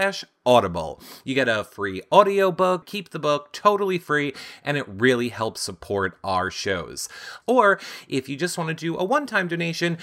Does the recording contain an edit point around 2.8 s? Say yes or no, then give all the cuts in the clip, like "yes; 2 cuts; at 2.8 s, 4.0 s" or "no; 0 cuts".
yes; 2 cuts; at 2.8 s, 7.4 s